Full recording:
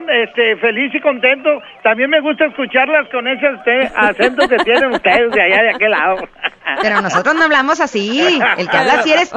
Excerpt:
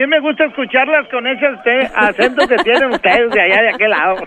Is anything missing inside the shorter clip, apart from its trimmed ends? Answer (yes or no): no